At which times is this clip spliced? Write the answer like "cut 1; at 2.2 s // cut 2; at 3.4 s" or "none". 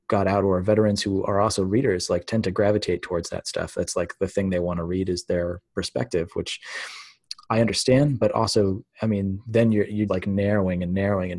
cut 1; at 8.9 s // cut 2; at 10.1 s